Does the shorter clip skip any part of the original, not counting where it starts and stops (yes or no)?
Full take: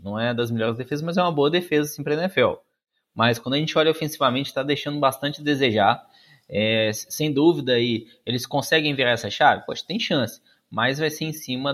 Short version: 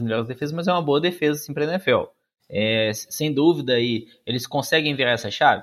yes